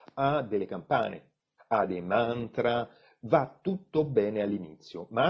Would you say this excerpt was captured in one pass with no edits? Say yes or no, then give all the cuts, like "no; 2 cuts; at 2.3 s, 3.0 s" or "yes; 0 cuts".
no; 1 cut; at 1.6 s